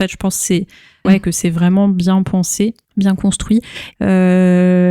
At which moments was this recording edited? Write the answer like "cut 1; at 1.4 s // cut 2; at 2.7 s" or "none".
cut 1; at 1.0 s // cut 2; at 2.8 s // cut 3; at 3.9 s